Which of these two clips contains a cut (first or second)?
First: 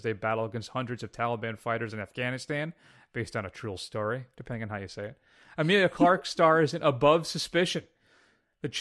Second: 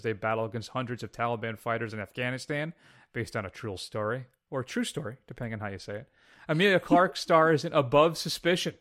first